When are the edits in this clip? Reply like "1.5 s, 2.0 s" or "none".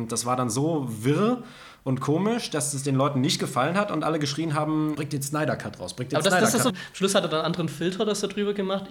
4.9 s, 6.7 s